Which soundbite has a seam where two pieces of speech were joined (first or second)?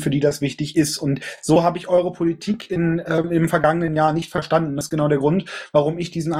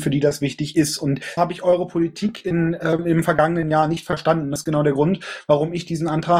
second